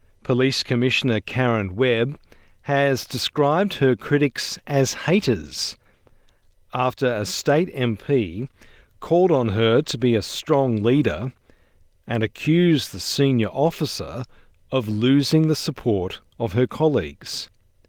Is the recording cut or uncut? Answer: uncut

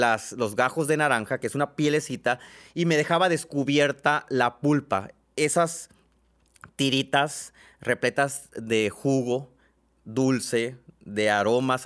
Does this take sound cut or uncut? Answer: uncut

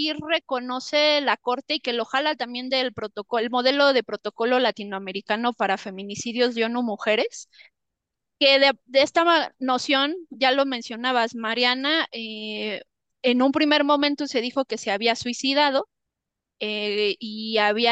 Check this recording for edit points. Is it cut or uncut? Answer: uncut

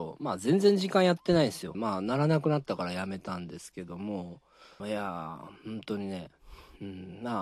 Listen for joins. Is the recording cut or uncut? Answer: cut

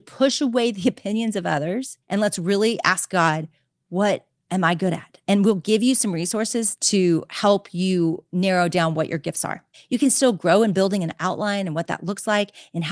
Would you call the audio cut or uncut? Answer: cut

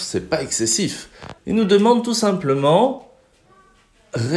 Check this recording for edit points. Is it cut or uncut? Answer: cut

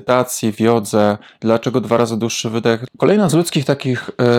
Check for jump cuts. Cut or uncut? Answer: cut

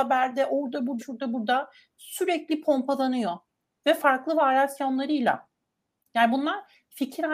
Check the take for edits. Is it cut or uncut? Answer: cut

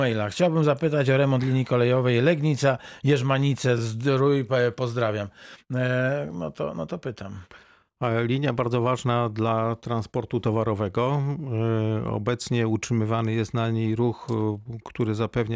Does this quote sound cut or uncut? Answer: uncut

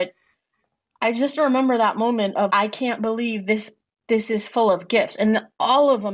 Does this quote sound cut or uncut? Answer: cut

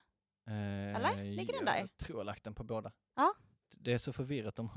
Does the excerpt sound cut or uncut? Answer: uncut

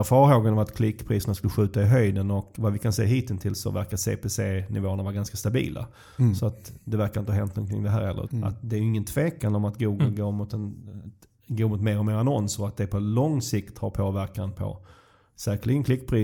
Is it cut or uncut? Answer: cut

